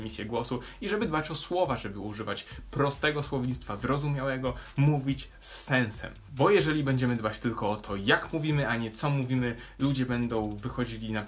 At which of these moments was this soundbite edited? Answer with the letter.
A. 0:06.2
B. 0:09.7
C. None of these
C